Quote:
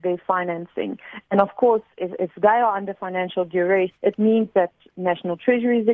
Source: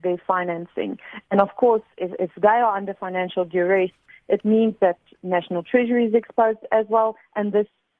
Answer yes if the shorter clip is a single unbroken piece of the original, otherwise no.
no